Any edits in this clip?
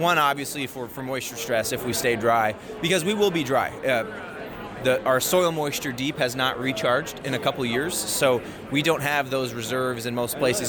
no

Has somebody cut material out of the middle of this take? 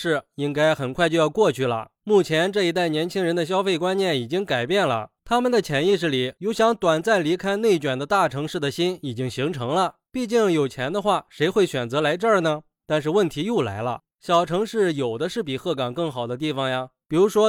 no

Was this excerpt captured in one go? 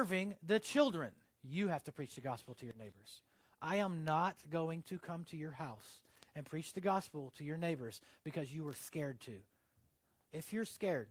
no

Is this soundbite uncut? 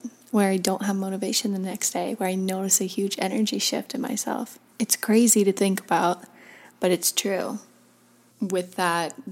no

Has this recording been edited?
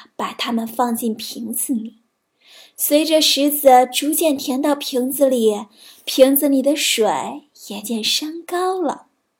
yes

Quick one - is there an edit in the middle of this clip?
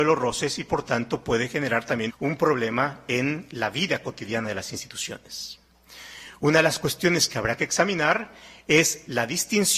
yes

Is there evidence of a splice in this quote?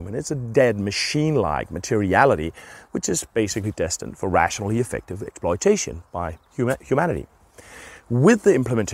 no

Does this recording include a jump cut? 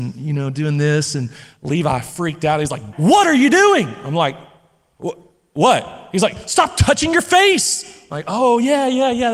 yes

